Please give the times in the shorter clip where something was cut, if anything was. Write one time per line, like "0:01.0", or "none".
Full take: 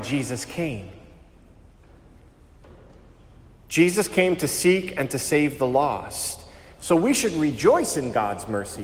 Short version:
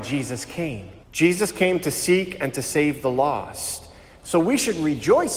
0:01.0